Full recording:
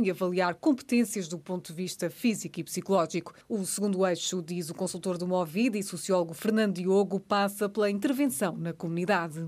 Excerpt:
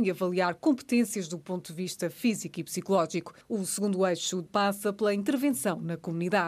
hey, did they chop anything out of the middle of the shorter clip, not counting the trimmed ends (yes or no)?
yes